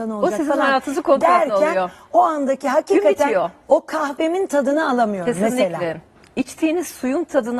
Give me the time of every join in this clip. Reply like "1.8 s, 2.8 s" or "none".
none